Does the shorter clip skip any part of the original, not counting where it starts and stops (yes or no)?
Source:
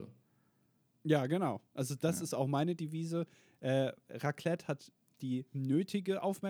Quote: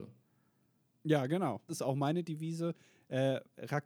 yes